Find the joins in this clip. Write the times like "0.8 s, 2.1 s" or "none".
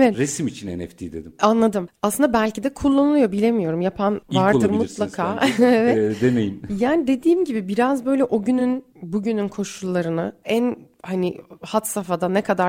none